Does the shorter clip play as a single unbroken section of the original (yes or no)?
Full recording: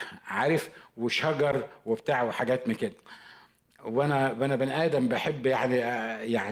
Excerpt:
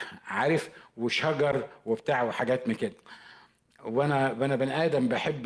yes